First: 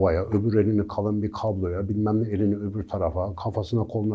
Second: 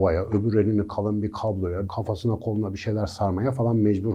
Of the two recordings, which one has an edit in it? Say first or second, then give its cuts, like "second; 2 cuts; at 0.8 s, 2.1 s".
second; 1 cut; at 1.9 s